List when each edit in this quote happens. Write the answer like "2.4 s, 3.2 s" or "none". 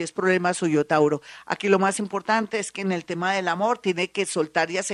none